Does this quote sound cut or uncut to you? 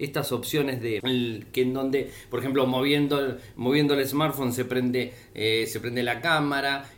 cut